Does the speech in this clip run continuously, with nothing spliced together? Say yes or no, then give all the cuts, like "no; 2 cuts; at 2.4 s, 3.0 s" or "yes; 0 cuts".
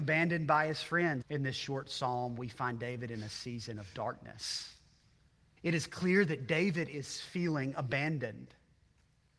no; 2 cuts; at 1.2 s, 5.6 s